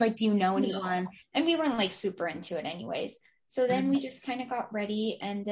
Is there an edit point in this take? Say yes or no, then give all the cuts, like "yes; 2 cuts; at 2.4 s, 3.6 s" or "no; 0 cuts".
yes; 1 cut; at 1.2 s